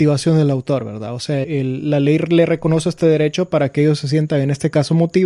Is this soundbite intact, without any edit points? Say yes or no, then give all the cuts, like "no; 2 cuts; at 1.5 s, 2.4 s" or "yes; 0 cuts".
no; 1 cut; at 1.4 s